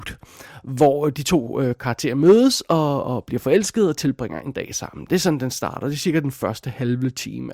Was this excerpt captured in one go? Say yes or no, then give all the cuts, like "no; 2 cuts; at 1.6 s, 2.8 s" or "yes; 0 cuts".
yes; 0 cuts